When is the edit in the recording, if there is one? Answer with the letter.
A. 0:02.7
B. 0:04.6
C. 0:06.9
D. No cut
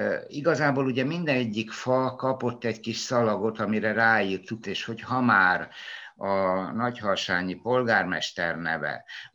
B